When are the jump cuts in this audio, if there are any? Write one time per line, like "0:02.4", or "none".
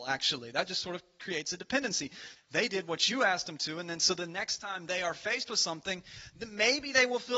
0:02.4